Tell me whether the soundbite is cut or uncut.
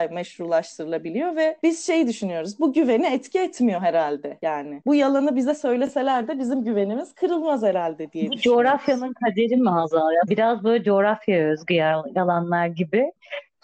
cut